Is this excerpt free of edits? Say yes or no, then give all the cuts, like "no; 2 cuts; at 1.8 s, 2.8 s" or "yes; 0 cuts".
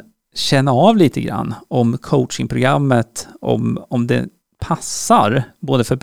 yes; 0 cuts